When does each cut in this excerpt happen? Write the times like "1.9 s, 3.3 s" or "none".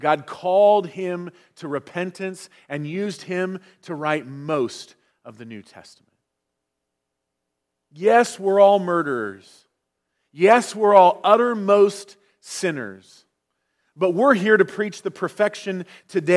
none